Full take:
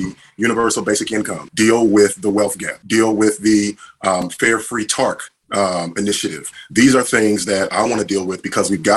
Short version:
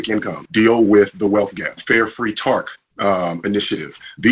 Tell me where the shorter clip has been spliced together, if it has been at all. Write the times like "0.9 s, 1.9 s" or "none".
1.8 s